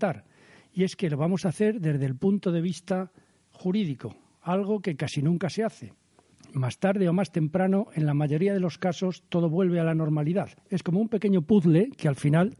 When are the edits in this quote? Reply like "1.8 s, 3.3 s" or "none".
6.3 s, 10.6 s